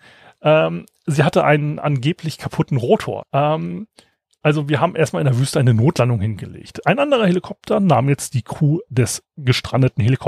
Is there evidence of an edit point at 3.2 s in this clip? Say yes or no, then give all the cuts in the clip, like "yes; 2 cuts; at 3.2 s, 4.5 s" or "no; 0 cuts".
yes; 1 cut; at 3.2 s